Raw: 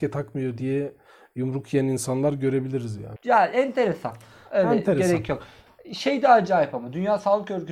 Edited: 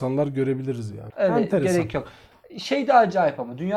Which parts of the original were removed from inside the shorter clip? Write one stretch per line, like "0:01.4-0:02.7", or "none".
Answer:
0:03.2-0:04.5